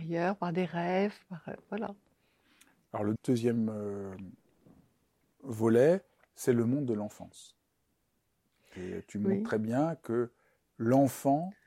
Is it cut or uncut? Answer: cut